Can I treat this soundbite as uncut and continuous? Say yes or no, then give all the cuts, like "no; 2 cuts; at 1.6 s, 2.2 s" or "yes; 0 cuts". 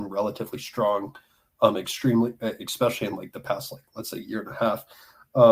yes; 0 cuts